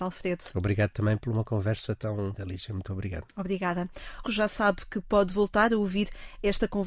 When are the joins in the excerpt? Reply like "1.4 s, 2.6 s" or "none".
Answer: 2.4 s, 4.2 s

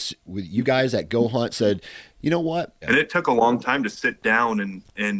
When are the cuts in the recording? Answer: 2.8 s

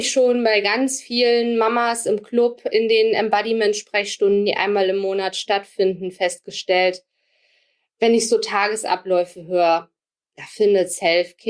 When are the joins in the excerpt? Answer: none

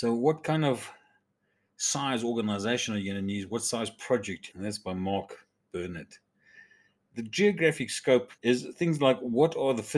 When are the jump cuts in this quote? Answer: 4.5 s, 8.4 s

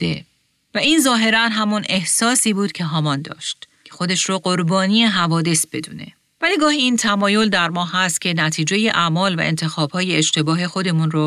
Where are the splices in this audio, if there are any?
6.4 s

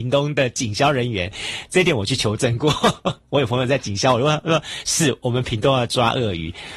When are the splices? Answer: none

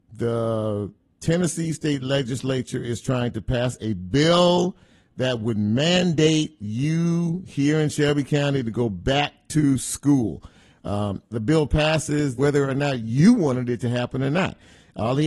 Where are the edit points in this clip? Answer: 11.3 s, 12.4 s

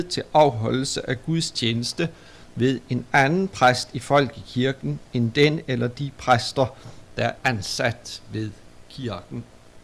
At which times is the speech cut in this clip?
7.4 s

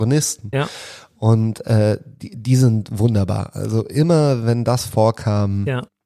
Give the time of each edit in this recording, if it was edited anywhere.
none

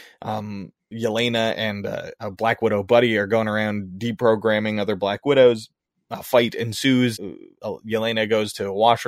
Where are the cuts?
7.1 s

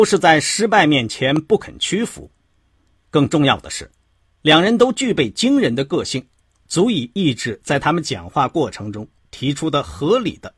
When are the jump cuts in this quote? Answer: none

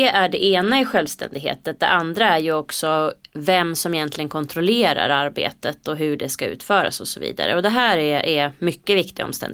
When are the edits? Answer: none

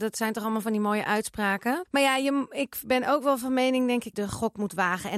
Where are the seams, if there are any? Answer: 1.9 s, 4.1 s

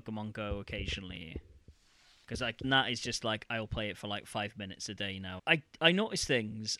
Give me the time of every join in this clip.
2.6 s, 5.4 s

